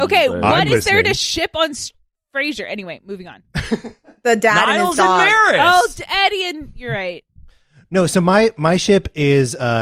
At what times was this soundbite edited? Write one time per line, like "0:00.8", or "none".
none